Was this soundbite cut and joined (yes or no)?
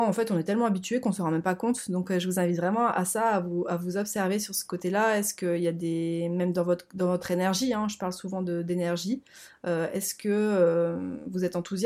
no